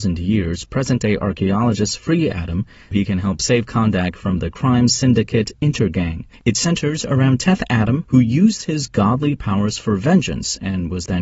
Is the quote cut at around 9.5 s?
no; 3 cuts; at 2.9 s, 6.3 s, 8.0 s

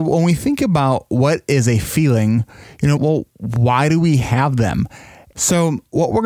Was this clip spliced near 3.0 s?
yes; 2 cuts; at 3.0 s, 5.3 s

